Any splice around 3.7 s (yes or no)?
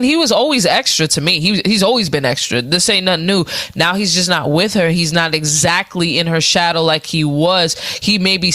no